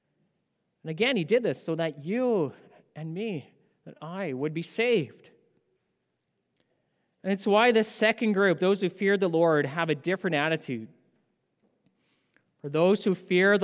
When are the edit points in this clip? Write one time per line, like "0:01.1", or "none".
none